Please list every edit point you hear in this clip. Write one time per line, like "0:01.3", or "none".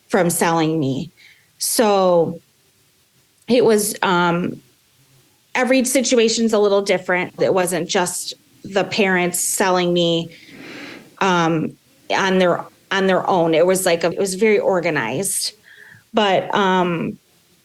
0:07.4
0:14.1